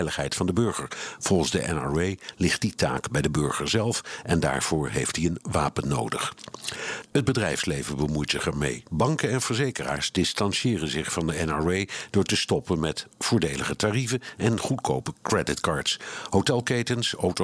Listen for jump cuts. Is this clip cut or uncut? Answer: cut